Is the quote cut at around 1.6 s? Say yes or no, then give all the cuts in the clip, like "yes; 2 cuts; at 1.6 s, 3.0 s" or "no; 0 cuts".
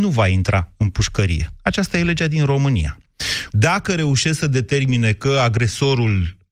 no; 1 cut; at 3.5 s